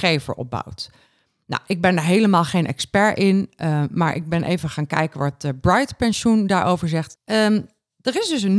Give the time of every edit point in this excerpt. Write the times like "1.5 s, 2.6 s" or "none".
7.2 s